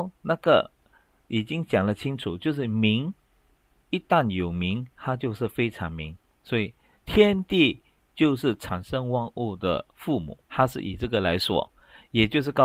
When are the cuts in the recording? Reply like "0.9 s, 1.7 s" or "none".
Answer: 6.3 s, 10.4 s